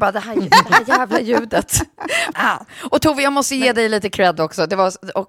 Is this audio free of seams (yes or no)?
no